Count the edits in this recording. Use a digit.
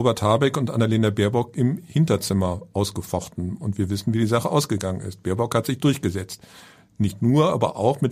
0